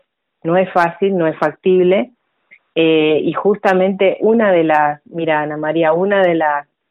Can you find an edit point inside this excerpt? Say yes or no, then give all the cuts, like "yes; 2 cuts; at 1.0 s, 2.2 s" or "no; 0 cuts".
no; 0 cuts